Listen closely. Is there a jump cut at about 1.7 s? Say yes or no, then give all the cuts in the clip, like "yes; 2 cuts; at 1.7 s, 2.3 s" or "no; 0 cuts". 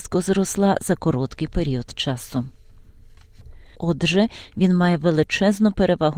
no; 1 cut; at 3.7 s